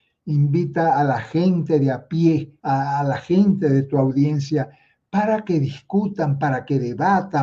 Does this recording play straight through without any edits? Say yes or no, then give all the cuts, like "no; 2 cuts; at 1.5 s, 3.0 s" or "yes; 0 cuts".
no; 1 cut; at 2.6 s